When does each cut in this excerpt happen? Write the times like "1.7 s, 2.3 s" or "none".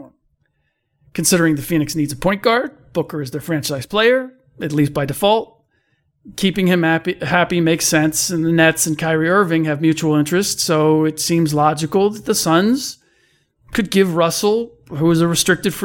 none